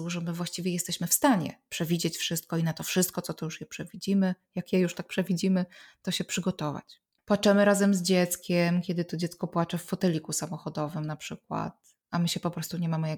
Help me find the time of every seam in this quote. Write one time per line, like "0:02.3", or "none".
0:07.2